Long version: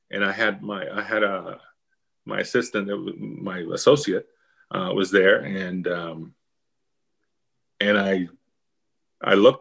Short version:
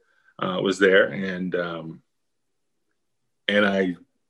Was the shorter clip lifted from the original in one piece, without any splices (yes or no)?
yes